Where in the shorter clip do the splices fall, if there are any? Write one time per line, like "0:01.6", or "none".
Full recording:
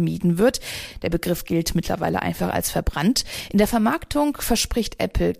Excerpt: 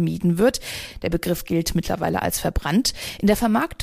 0:02.2